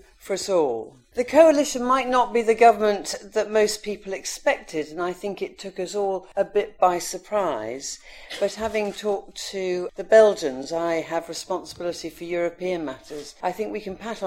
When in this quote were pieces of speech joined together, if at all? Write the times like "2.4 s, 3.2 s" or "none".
none